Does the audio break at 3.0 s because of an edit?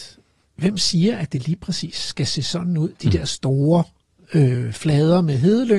no; 0 cuts

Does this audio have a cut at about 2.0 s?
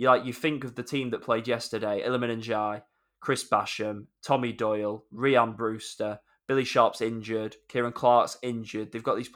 yes; 1 cut; at 2.0 s

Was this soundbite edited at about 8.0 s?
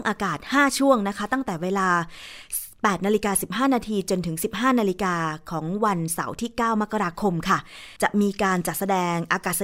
yes; 1 cut; at 8.0 s

